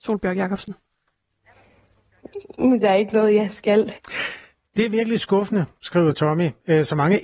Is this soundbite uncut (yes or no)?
no